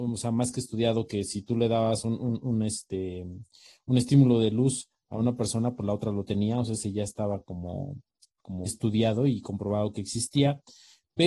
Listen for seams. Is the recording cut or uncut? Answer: cut